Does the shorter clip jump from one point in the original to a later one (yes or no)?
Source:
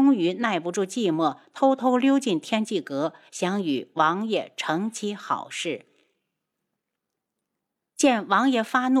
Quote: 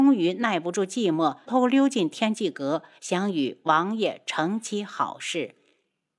yes